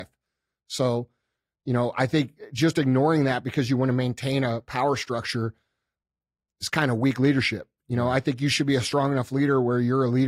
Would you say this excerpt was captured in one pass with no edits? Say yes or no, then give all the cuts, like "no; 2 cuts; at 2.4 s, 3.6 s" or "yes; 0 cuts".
yes; 0 cuts